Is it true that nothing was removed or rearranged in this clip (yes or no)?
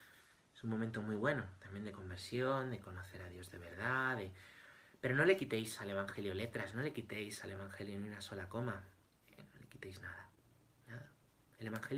yes